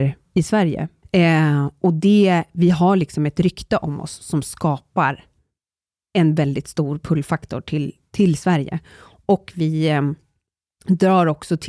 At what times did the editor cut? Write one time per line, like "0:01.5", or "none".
0:01.0